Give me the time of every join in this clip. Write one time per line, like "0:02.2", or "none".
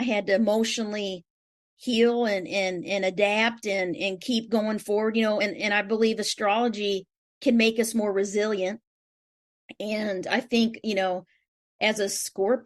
none